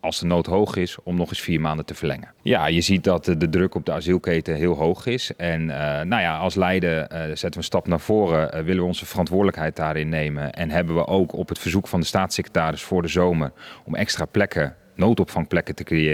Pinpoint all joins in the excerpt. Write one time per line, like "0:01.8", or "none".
0:02.4